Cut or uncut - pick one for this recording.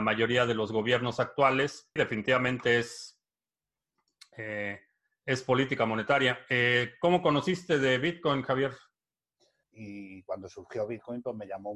cut